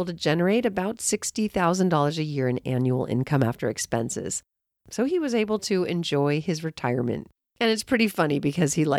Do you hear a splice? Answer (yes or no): no